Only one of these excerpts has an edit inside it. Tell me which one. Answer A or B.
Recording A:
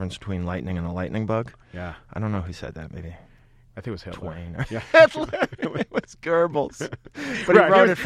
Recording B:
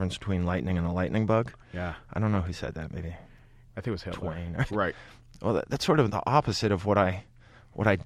B